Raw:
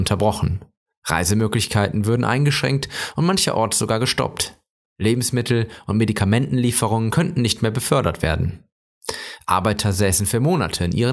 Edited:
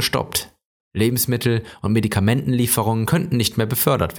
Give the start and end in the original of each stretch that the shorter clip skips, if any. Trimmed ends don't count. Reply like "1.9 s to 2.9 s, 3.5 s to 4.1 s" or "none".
none